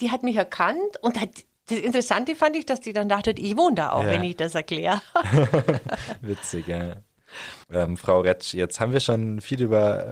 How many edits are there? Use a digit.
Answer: 1